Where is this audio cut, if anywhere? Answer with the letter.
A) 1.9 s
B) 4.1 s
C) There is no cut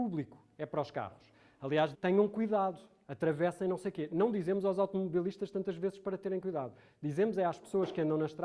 A